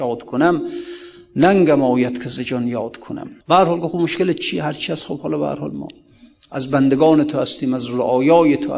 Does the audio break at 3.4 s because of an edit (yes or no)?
yes